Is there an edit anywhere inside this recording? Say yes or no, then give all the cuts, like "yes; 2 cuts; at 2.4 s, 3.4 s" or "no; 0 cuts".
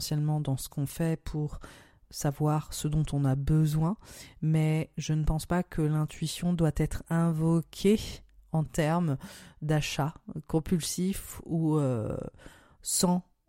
no; 0 cuts